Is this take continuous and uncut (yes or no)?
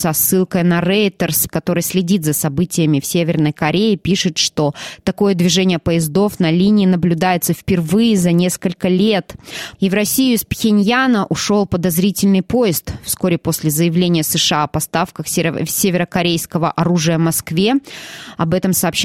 no